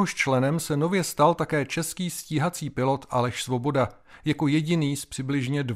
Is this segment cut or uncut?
uncut